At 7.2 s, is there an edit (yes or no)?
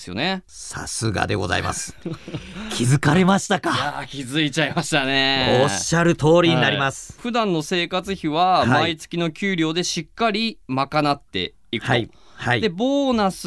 yes